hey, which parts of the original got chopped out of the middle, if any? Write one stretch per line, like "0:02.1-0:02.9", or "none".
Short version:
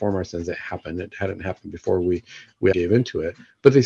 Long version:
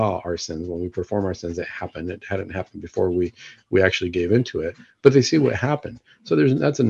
0:03.8-0:04.1